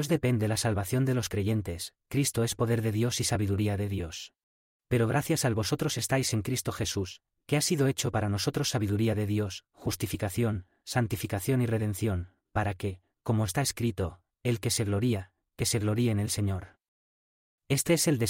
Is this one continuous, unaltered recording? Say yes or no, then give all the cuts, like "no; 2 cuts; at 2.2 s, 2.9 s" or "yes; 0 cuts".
no; 1 cut; at 4.8 s